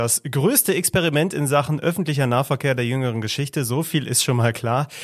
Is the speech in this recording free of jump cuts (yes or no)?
yes